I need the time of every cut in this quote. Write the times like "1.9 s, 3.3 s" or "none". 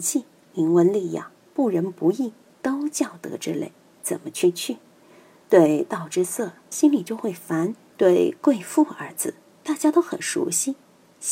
6.7 s, 7.9 s